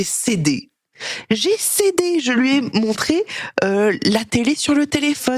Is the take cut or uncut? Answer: uncut